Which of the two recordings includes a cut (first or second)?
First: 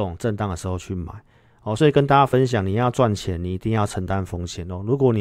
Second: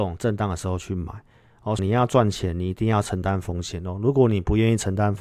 second